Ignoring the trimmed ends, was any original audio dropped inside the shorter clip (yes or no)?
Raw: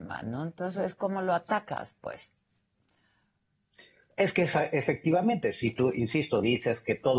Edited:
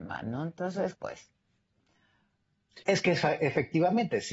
yes